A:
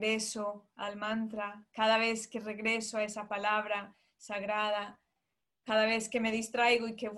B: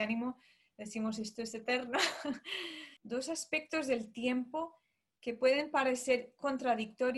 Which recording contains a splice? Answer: B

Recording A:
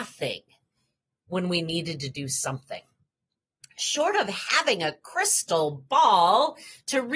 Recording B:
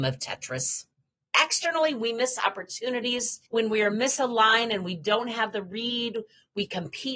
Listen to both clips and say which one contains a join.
B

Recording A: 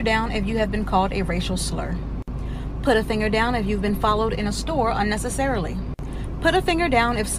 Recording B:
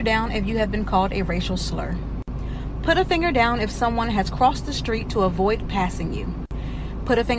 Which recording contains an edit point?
B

